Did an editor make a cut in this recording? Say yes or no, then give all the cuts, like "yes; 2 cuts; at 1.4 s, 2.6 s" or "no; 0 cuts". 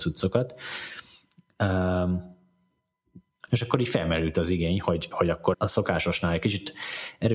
yes; 2 cuts; at 3.5 s, 5.5 s